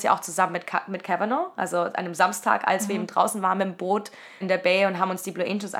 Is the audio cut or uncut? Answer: cut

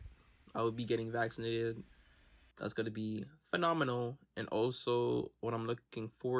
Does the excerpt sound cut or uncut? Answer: uncut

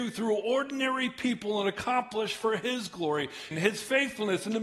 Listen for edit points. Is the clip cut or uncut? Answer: cut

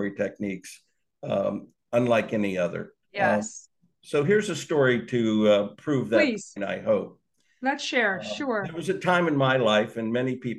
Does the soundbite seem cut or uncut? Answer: cut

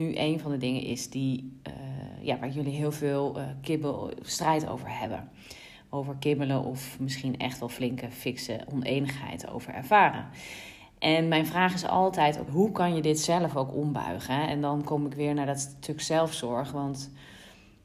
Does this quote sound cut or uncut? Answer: cut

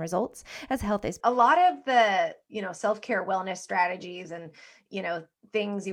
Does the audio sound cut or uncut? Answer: cut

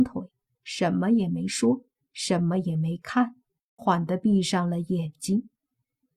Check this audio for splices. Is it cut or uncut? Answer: cut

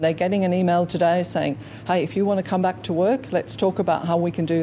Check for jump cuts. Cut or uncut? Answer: uncut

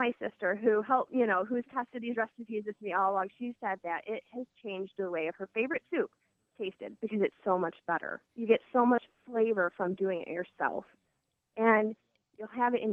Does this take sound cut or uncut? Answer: cut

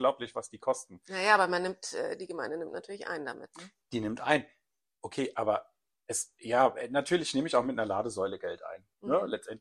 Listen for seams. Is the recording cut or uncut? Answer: uncut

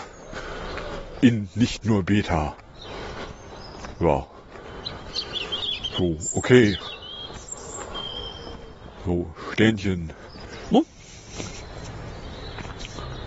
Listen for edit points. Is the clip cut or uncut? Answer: cut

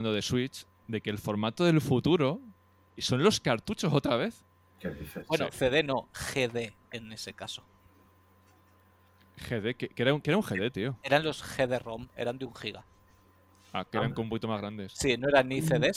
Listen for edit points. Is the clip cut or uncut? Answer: cut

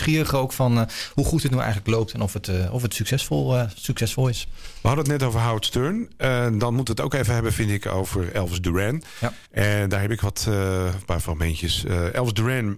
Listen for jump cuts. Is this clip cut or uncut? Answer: cut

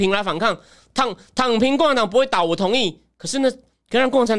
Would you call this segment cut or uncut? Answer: uncut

